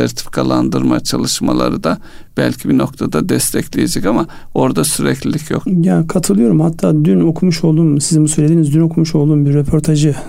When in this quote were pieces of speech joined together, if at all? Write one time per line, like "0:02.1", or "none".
0:05.6